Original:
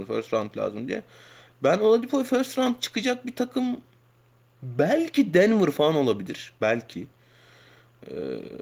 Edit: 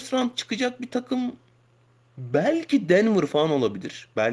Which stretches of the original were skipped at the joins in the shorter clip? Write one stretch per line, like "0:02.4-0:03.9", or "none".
none